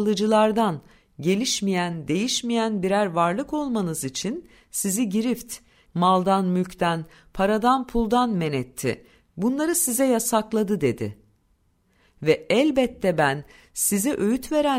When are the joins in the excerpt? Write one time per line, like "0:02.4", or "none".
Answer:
0:05.9

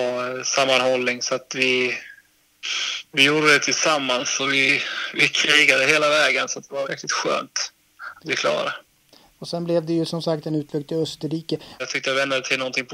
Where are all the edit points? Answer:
0:06.8
0:11.8

